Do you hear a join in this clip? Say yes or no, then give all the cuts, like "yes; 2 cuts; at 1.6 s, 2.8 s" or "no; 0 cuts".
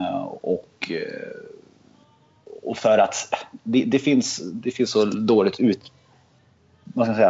no; 0 cuts